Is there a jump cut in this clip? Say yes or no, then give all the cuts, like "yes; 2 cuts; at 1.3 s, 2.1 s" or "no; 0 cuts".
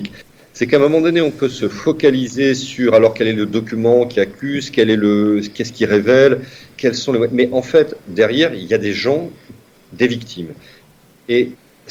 no; 0 cuts